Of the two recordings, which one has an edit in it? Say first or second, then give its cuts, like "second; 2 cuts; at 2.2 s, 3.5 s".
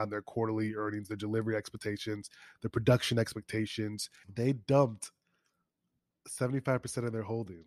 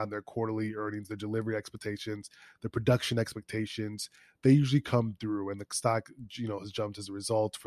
first; 1 cut; at 4.2 s